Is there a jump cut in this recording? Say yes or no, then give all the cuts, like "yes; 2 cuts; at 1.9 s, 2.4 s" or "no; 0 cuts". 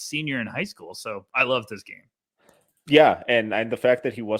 no; 0 cuts